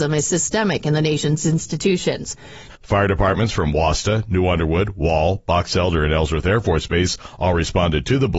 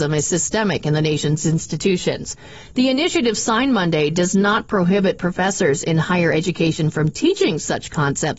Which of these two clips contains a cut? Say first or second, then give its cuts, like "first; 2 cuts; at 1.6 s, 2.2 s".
first; 1 cut; at 2.7 s